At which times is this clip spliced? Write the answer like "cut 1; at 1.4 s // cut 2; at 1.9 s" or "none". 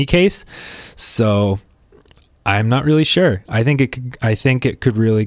none